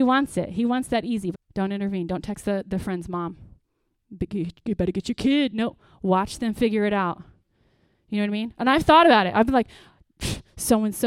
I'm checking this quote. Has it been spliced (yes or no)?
yes